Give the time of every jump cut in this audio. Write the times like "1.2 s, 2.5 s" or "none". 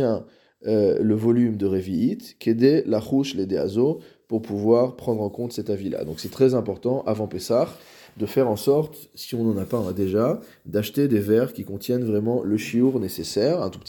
none

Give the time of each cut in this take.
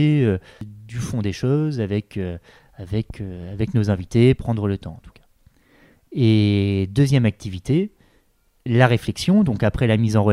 4.4 s

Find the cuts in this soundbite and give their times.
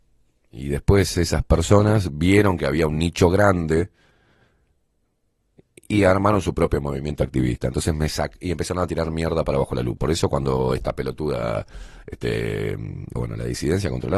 10.0 s, 13.2 s

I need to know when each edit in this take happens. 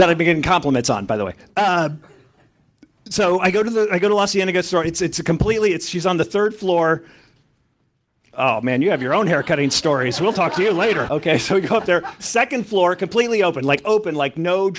11.1 s

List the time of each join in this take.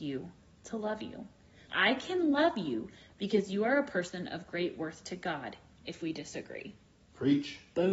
1.7 s, 5.8 s

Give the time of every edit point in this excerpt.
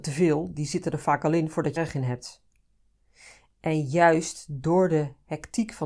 1.8 s

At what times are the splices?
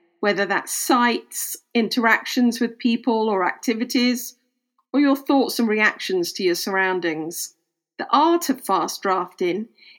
none

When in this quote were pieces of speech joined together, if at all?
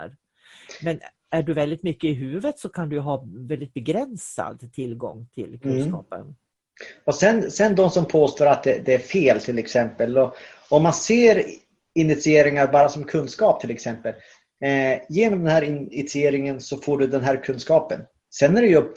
none

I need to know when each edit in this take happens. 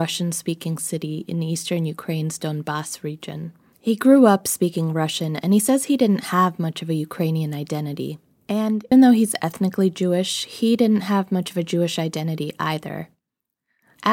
8.9 s

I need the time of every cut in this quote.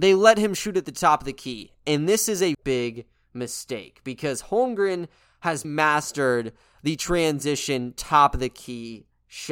2.5 s, 5.6 s

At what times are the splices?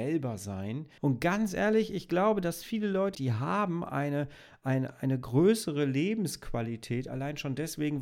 1.0 s, 3.1 s

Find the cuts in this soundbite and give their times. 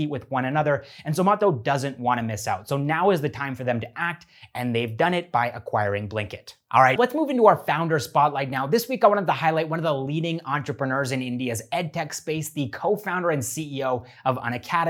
7.0 s

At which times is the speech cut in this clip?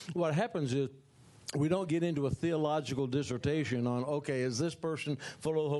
none

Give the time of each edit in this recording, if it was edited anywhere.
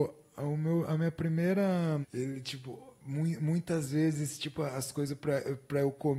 2.0 s

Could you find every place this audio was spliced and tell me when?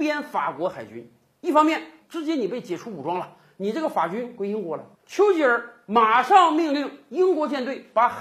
2.0 s, 5.0 s

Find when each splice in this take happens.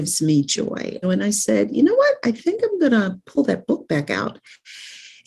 1.0 s

